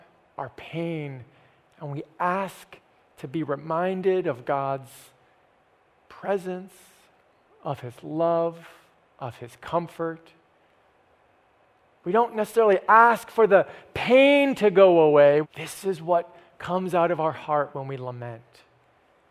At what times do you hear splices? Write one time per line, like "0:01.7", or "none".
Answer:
0:15.4